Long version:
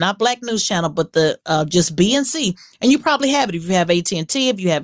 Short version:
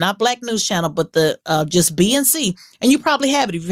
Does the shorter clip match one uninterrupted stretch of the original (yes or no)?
yes